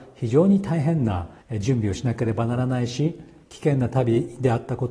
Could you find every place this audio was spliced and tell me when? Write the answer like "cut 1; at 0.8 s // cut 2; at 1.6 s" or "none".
cut 1; at 1.4 s